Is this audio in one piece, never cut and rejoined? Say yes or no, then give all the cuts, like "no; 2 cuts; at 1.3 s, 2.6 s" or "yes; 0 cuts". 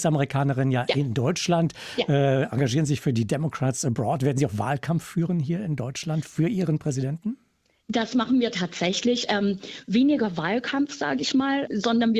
yes; 0 cuts